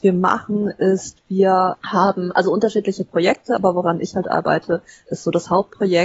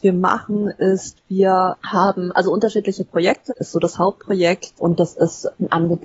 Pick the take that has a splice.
second; 2 cuts; at 3.5 s, 4.7 s

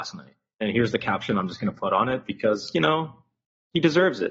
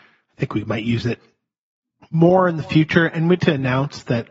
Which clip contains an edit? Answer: second; 1 cut; at 3.4 s

